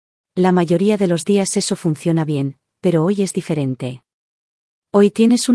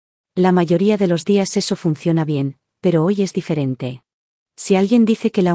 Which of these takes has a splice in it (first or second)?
second